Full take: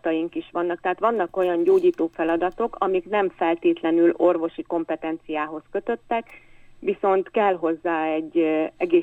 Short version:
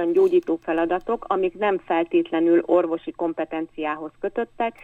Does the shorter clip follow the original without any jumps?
yes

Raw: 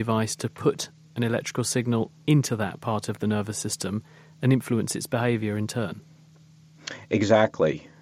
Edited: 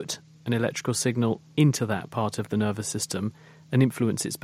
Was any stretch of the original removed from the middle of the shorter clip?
no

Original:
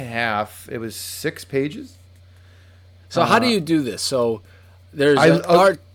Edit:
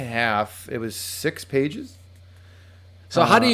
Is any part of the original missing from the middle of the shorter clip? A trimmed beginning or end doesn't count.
no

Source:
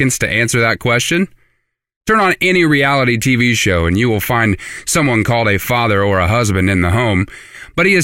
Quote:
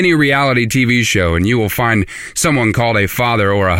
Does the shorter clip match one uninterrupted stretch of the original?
yes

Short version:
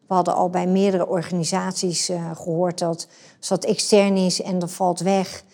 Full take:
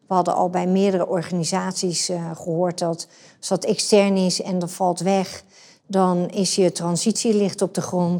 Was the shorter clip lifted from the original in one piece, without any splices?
yes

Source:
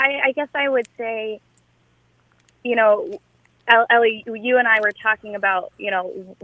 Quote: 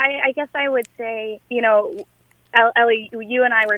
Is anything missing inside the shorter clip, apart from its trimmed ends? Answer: yes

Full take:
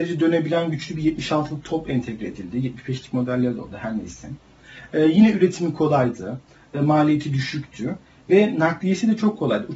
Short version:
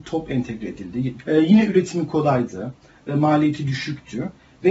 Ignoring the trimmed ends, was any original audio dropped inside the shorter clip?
yes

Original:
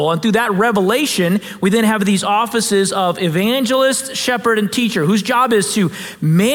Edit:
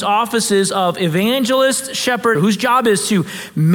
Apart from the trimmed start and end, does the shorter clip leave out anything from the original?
yes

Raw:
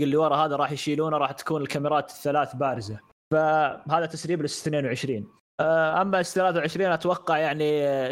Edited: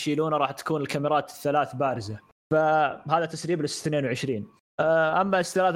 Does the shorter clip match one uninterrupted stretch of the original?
yes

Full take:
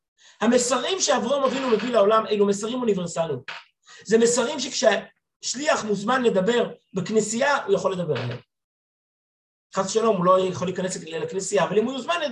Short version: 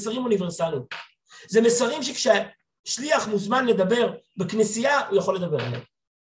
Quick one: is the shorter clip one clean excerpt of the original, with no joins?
yes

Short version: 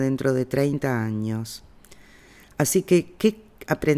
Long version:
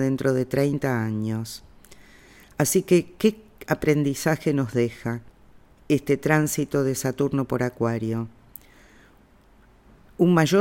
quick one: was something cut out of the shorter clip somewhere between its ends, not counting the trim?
no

